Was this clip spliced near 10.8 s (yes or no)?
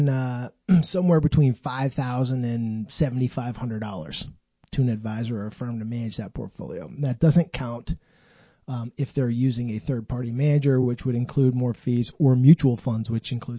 no